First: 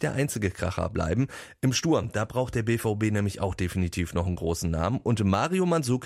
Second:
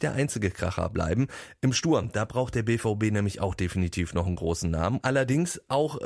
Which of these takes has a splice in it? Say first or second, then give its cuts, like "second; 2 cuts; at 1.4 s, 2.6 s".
second; 1 cut; at 5.0 s